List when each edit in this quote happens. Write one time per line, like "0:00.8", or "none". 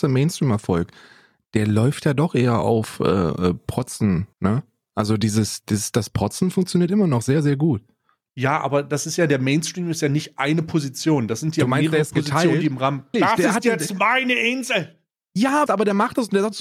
0:04.3
0:13.1
0:15.7